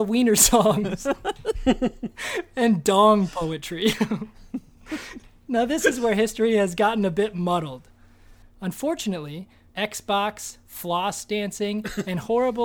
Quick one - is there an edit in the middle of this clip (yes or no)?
yes